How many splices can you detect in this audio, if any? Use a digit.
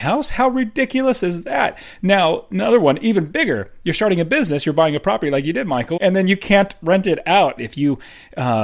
2